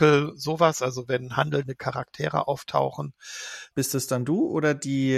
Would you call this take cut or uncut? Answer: cut